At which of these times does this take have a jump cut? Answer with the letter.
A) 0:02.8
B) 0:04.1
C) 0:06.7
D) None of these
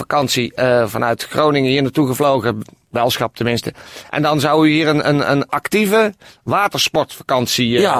D